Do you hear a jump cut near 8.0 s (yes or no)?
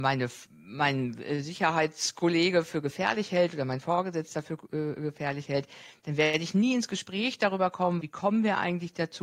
yes